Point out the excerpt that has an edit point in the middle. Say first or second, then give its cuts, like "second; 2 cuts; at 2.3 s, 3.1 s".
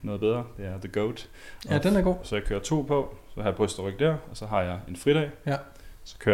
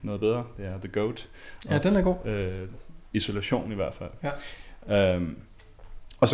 first; 1 cut; at 2.2 s